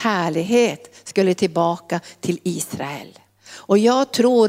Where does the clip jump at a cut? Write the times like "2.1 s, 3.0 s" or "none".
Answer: none